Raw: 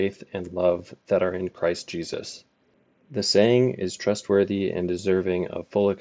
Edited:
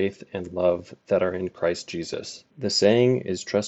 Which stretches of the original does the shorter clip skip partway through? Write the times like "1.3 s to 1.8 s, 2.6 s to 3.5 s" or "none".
2.5 s to 3.0 s

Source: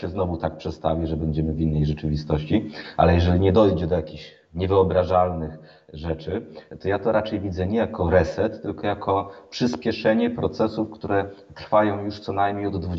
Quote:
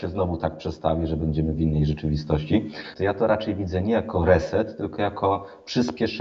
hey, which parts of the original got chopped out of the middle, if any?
2.9 s to 6.8 s

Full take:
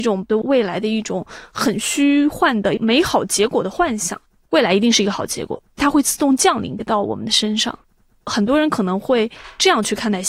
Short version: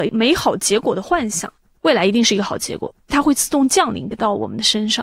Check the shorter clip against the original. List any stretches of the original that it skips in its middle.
none

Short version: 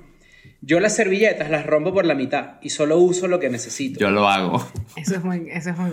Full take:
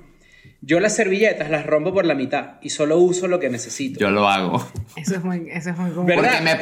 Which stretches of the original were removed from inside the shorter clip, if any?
none

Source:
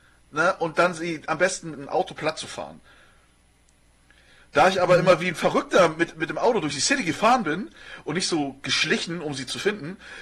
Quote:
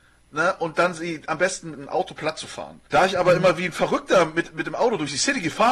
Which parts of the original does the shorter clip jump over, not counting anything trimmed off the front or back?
2.9 s to 4.5 s

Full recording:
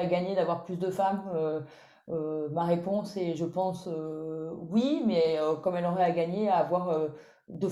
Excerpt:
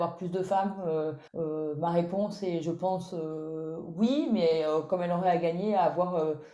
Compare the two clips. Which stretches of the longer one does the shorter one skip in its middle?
1.7 s to 2.0 s

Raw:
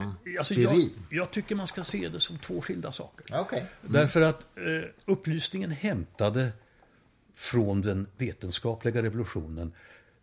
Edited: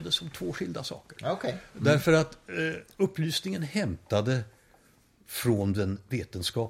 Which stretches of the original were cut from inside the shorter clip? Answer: none

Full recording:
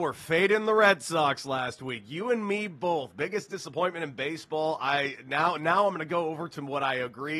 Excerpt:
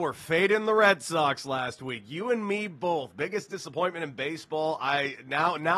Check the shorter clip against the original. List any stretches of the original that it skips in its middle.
none

